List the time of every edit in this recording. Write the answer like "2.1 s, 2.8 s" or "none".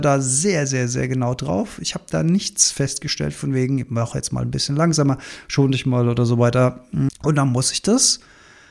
7.1 s